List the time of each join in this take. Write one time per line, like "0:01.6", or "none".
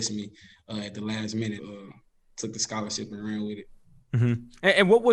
0:01.6